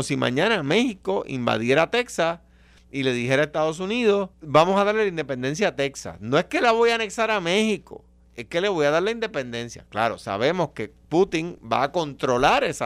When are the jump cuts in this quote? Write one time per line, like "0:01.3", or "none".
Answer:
0:04.3